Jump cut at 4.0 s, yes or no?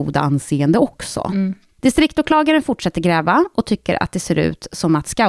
no